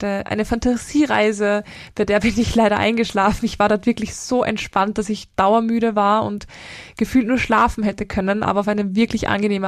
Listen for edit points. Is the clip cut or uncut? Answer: uncut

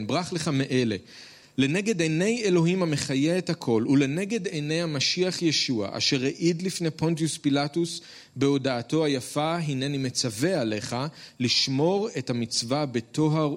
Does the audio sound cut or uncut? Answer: cut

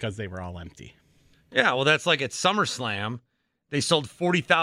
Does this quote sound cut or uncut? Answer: cut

